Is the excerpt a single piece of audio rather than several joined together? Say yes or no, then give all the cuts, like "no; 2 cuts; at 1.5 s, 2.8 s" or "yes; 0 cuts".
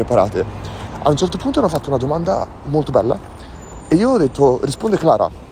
yes; 0 cuts